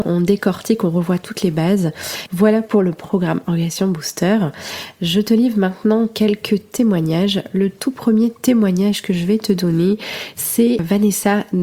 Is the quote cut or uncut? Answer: cut